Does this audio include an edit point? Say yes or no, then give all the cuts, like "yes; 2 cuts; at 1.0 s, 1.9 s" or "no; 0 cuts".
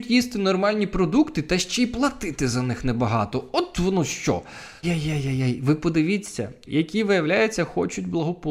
yes; 2 cuts; at 4.8 s, 6.7 s